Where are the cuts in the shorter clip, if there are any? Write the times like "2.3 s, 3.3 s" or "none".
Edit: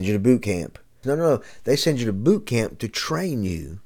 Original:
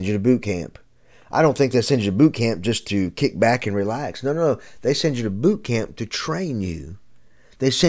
1.0 s